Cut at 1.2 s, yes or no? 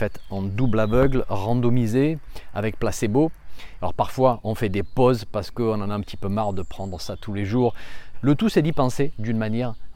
no